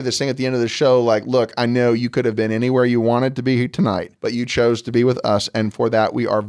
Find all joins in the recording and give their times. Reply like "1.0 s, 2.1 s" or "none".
4.2 s